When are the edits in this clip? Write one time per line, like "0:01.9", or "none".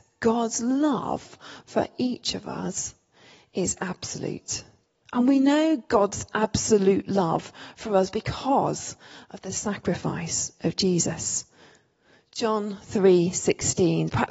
none